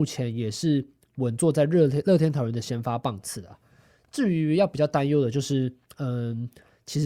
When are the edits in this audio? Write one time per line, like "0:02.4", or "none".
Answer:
none